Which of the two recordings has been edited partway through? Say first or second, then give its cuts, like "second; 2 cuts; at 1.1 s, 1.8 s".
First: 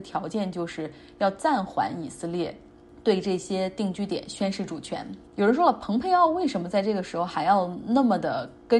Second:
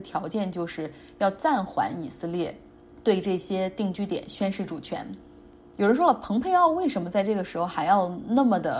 first; 1 cut; at 5.3 s